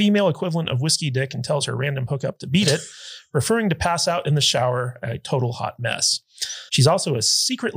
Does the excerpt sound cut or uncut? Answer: cut